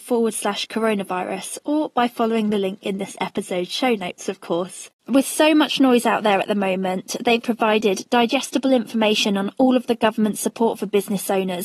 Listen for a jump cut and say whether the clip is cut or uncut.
cut